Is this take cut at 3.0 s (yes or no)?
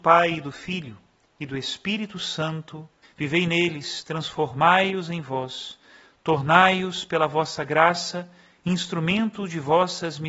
yes